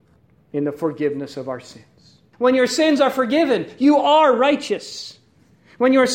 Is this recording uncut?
no; 1 cut; at 2.3 s

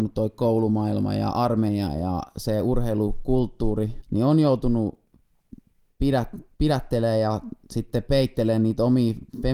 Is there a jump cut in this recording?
yes; 1 cut; at 4.0 s

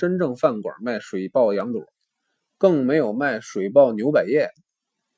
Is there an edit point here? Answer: no; 0 cuts

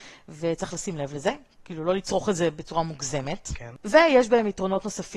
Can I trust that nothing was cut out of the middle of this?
yes; 0 cuts

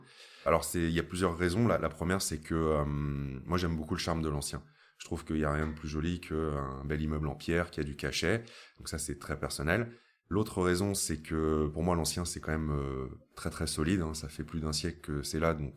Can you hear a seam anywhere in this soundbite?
no; 0 cuts

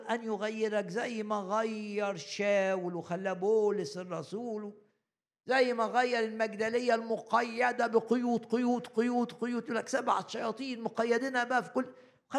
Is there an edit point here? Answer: no; 0 cuts

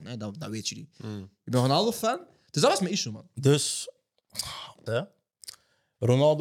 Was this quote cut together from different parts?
yes; 2 cuts; at 2.5 s, 4.9 s

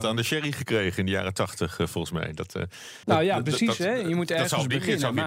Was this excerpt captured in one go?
no; 1 cut; at 3.0 s

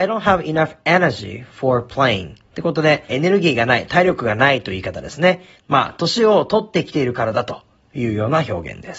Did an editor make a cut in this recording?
yes; 2 cuts; at 3.1 s, 5.6 s

